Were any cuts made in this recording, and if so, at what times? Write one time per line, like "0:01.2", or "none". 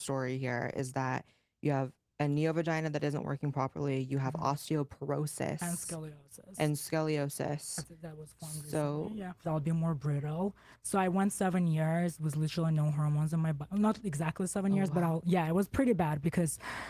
0:09.4
0:10.7